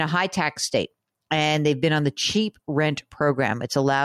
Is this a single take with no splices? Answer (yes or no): yes